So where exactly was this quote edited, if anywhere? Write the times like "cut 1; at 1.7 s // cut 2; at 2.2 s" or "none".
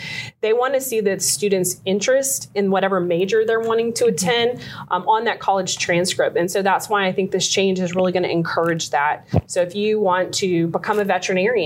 none